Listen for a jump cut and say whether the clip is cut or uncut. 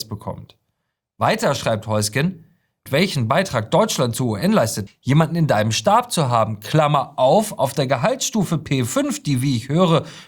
cut